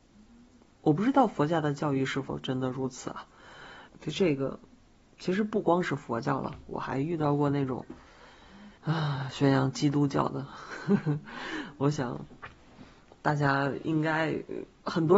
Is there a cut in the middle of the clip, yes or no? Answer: yes